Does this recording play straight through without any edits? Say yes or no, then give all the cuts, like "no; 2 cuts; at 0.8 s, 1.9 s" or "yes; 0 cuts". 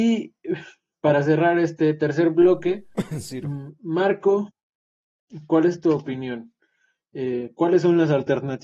yes; 0 cuts